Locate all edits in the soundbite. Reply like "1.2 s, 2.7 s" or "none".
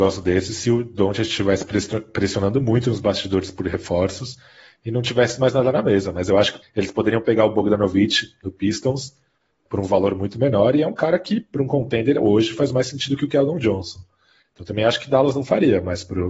6.6 s